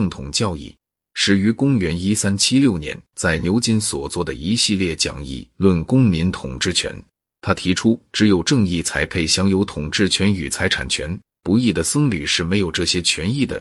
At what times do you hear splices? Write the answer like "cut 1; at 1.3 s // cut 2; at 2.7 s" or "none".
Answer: none